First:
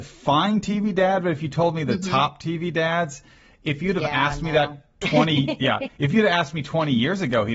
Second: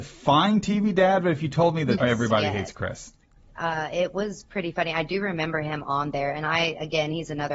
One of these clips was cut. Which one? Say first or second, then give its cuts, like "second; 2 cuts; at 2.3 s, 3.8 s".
second; 2 cuts; at 2.0 s, 3.5 s